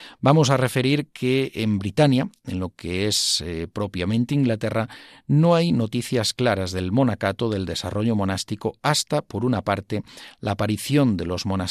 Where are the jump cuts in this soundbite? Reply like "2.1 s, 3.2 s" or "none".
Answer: none